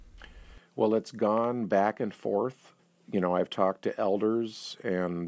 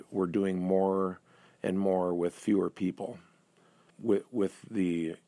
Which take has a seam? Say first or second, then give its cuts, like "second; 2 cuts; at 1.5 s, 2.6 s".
second; 1 cut; at 3.9 s